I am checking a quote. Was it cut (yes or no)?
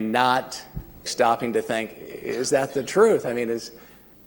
yes